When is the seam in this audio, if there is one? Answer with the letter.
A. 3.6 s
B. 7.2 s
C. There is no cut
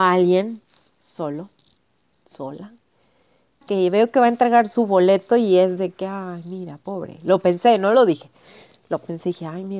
A